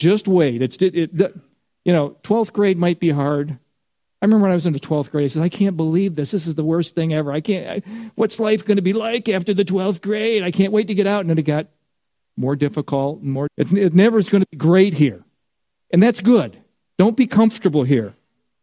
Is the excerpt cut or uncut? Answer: cut